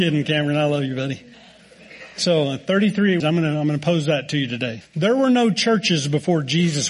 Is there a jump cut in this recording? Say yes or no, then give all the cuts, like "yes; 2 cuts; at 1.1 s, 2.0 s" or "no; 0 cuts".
yes; 2 cuts; at 3.2 s, 4.8 s